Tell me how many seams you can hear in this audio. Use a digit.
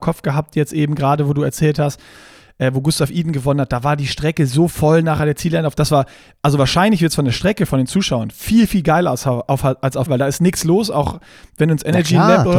1